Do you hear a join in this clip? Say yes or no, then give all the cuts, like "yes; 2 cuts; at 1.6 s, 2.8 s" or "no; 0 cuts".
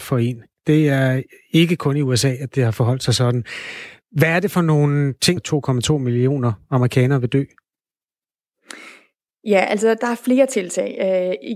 yes; 1 cut; at 5.4 s